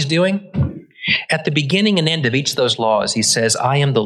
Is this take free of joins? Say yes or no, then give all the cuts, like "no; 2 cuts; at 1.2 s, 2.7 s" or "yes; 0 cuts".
yes; 0 cuts